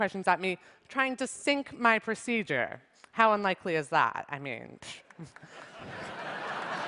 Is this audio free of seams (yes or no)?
yes